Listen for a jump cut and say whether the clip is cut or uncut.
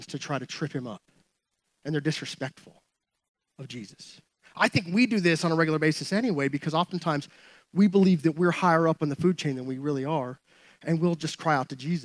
uncut